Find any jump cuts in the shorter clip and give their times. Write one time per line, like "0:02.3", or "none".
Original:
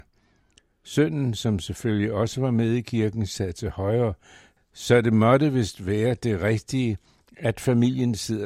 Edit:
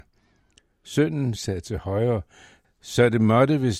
0:01.4